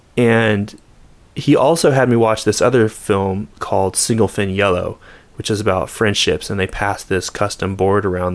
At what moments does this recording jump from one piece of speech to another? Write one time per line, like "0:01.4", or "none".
none